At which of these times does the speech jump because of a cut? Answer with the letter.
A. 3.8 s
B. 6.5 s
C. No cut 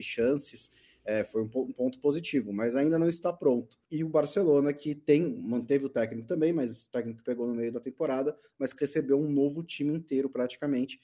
A